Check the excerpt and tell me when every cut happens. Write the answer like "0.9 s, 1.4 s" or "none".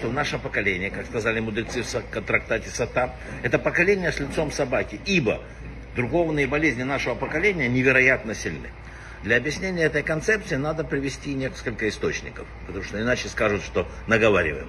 none